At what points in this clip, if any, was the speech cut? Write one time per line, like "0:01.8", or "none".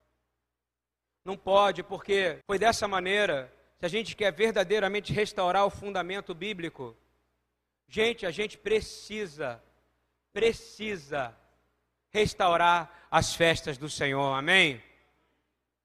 0:02.4